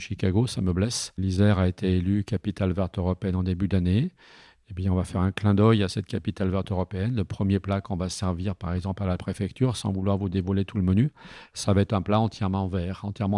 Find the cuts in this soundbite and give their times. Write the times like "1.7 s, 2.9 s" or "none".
none